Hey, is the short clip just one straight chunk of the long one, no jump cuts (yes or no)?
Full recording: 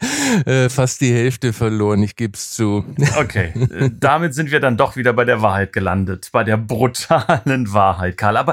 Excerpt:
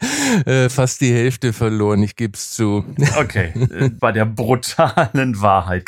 no